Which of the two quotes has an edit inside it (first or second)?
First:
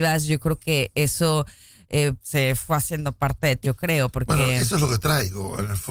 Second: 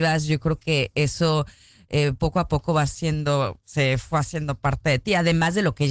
first